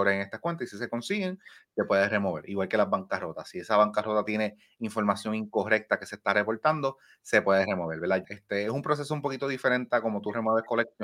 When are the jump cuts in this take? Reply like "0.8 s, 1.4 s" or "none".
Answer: 8.2 s